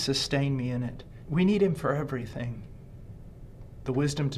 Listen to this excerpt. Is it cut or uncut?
cut